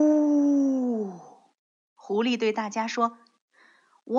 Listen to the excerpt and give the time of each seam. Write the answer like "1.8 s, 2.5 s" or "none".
1.8 s